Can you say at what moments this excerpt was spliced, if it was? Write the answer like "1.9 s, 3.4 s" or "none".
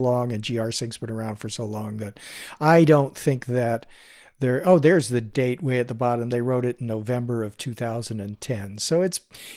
none